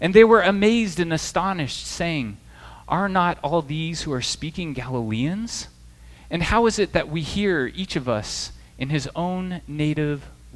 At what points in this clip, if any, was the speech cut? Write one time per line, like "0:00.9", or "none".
none